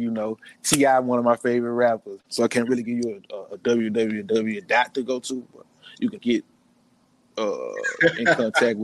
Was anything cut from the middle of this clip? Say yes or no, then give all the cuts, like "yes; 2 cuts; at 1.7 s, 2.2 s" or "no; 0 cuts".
yes; 2 cuts; at 2.2 s, 6.2 s